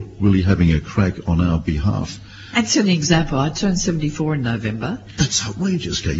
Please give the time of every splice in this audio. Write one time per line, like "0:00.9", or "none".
none